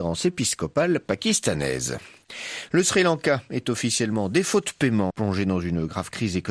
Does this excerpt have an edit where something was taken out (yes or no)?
yes